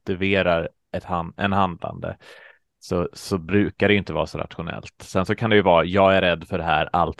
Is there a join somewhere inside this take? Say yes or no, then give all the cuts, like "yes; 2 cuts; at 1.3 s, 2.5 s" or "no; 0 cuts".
no; 0 cuts